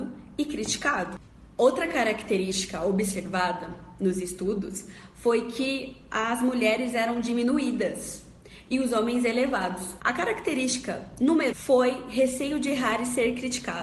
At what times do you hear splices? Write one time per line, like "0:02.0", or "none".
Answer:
0:10.0
0:11.5